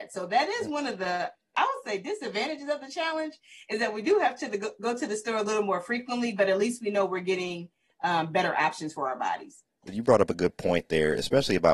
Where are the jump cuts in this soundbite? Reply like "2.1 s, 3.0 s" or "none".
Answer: none